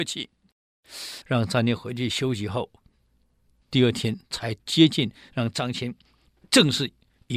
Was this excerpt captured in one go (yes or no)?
no